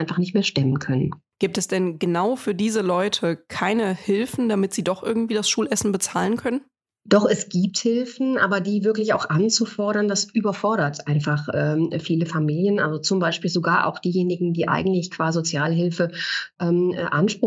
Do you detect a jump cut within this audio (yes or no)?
no